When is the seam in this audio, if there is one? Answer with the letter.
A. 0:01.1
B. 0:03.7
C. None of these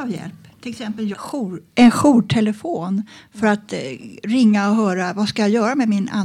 A